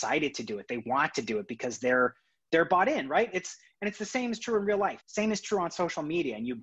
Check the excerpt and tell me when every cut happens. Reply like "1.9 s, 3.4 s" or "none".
5.0 s